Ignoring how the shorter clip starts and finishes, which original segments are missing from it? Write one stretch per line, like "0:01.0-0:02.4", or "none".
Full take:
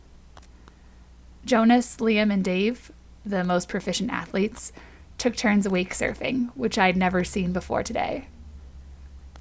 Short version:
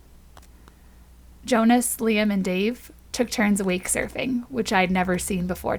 0:03.1-0:05.2